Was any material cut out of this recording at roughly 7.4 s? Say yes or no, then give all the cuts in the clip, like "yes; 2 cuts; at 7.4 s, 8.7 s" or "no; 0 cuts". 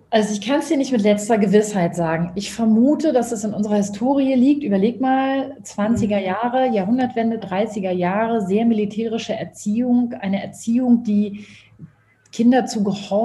yes; 1 cut; at 7.4 s